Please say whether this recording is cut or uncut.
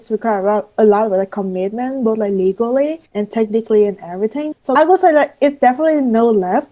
cut